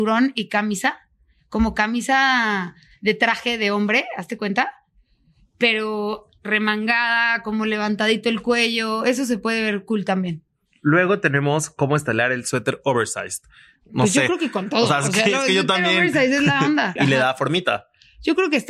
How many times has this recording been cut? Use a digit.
1